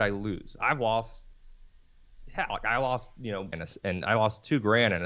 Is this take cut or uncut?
cut